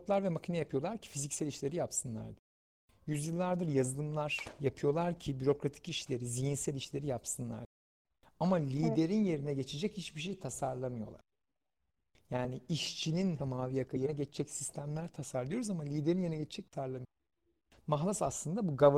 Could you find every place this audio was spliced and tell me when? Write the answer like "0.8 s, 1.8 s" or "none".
13.4 s, 16.7 s